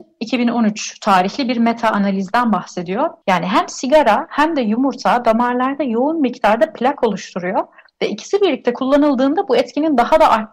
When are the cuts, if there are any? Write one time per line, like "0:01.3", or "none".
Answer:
0:03.2